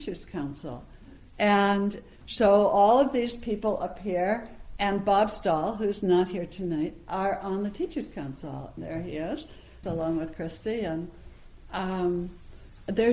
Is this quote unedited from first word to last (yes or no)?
no